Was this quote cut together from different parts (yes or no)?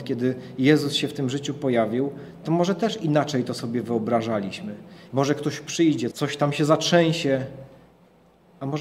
yes